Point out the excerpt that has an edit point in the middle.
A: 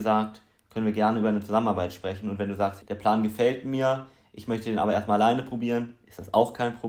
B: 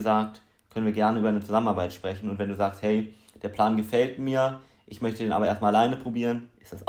A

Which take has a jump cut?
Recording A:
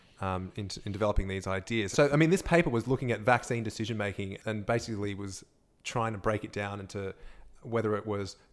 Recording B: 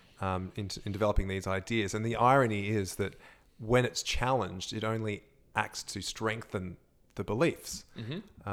A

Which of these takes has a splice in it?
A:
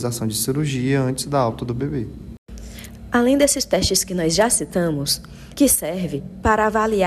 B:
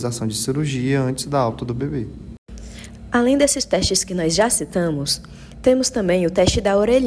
A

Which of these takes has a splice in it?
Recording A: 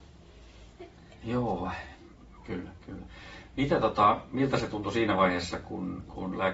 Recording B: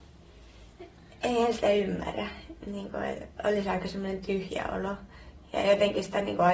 A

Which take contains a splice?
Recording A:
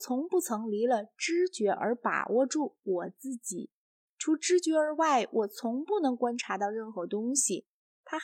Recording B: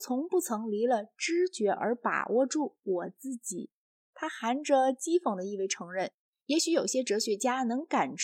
B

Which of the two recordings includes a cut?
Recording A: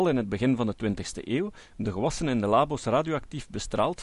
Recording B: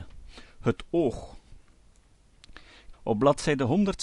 B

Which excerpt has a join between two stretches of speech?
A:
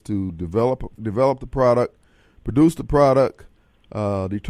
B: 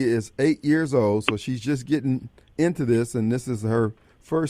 A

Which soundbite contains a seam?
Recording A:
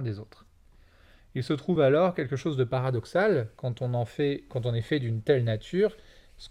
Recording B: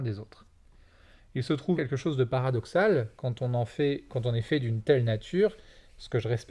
B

